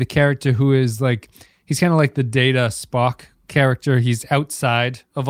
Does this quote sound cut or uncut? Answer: uncut